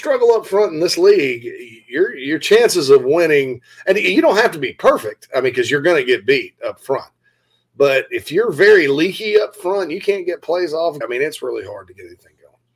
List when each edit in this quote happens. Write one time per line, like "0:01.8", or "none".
0:11.0